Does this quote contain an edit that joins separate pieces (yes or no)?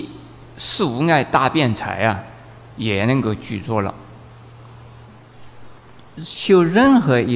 no